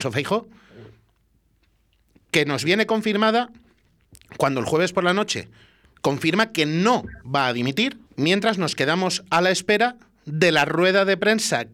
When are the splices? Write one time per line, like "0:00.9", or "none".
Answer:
0:05.8
0:08.1

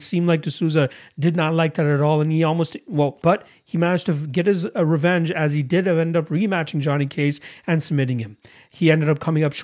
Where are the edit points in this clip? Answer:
0:03.2

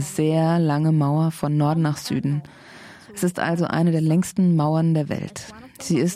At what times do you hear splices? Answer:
none

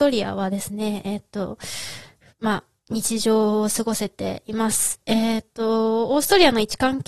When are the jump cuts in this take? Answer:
none

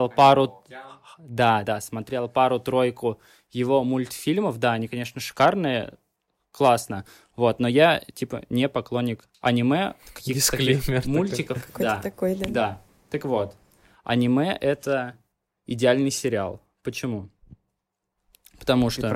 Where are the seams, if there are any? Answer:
0:01.6

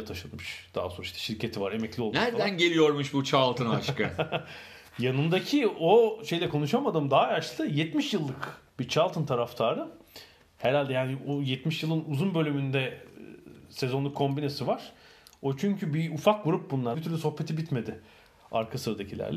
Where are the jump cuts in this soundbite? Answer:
0:08.7
0:16.9

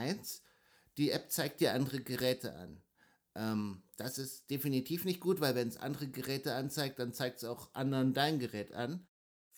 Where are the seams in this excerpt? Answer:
none

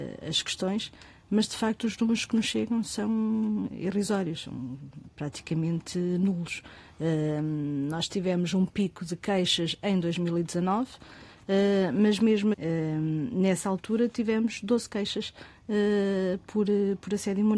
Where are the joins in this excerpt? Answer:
0:12.5

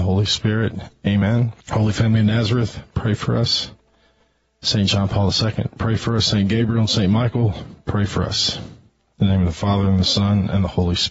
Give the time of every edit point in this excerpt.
0:01.6

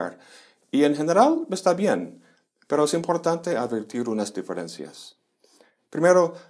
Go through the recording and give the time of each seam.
none

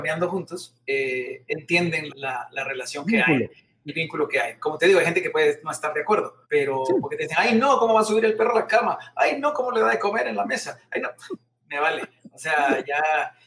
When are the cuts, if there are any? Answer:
0:02.1
0:03.9
0:06.4

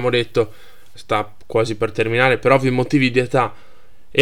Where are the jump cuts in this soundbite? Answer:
0:01.0

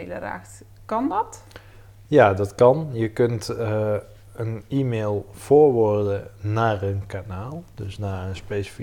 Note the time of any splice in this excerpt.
none

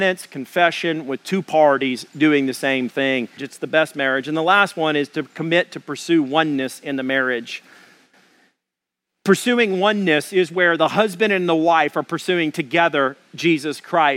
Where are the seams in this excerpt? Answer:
0:03.4

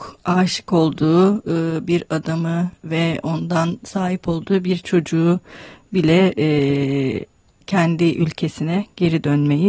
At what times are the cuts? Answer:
0:07.6

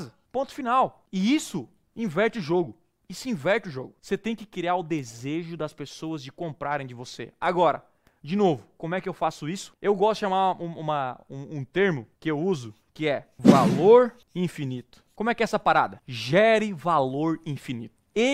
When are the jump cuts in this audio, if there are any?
none

